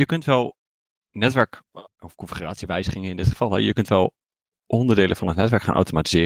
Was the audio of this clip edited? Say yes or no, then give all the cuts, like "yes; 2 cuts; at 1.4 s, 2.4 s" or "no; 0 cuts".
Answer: no; 0 cuts